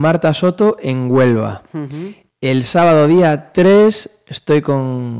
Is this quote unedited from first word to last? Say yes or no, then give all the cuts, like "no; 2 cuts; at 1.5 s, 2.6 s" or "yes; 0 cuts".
yes; 0 cuts